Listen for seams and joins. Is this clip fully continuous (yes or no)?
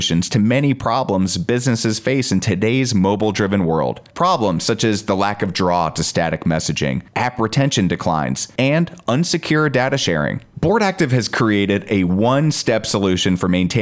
no